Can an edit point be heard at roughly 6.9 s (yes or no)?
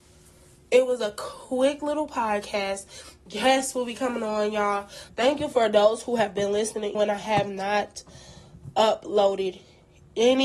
yes